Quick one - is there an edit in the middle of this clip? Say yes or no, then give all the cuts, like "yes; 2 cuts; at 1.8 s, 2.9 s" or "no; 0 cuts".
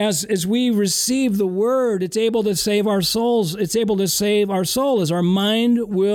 no; 0 cuts